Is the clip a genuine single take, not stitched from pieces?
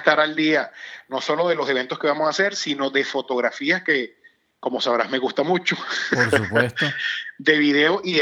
yes; 0 cuts

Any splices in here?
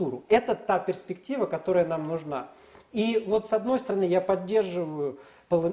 no; 0 cuts

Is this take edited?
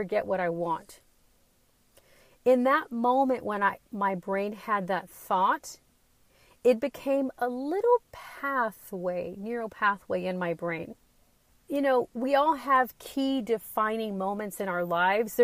yes; 1 cut; at 11.5 s

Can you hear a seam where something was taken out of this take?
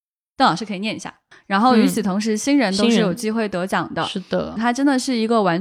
yes; 2 cuts; at 1.3 s, 4.6 s

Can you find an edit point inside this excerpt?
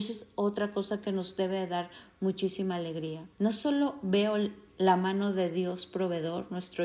yes; 1 cut; at 3.3 s

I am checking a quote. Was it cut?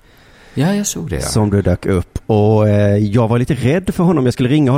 no; 0 cuts

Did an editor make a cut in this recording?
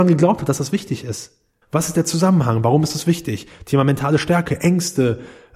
yes; 1 cut; at 1.6 s

